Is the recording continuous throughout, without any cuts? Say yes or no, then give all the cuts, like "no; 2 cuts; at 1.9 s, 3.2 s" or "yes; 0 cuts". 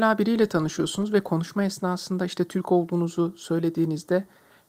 yes; 0 cuts